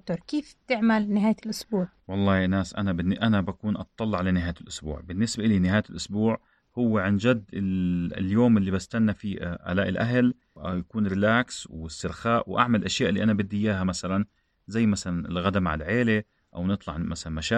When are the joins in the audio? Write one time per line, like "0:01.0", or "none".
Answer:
none